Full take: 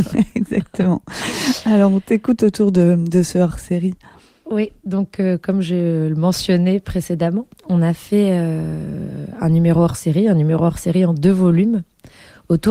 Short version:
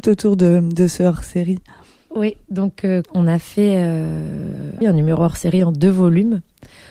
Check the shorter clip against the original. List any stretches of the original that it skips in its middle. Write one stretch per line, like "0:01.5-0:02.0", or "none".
0:05.4-0:07.6
0:09.4-0:10.2

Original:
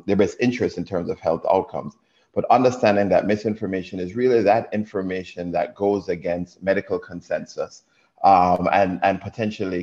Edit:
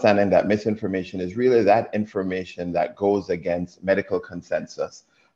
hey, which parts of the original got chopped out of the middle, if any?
none

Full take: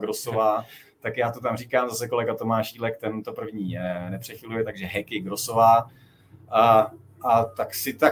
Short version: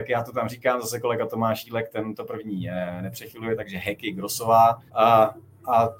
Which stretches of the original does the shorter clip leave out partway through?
0:05.9-0:06.4

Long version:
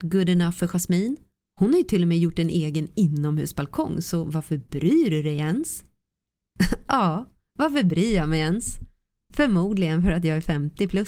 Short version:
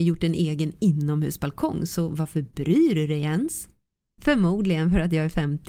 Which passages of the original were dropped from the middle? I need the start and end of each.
0:06.2-0:09.2

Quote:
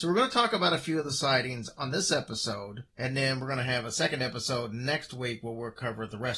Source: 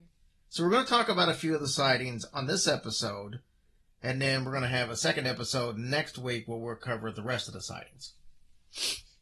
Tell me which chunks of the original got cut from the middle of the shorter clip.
0:03.5-0:03.9

